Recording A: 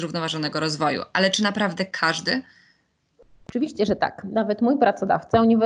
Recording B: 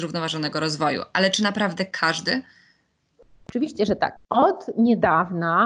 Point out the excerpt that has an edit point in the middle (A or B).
B